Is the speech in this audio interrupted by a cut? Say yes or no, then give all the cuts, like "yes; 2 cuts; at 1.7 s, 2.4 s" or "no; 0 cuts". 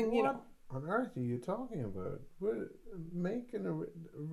no; 0 cuts